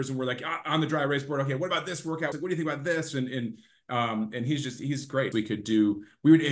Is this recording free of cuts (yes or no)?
no